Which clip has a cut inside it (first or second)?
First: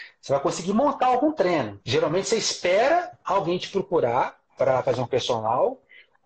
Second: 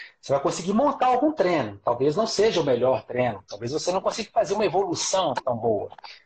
first